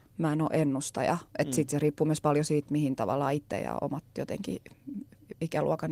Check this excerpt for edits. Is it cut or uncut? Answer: uncut